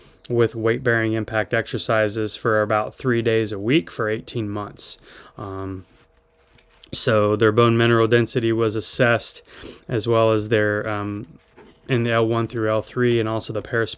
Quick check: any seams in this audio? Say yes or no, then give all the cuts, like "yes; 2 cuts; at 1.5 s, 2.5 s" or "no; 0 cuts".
no; 0 cuts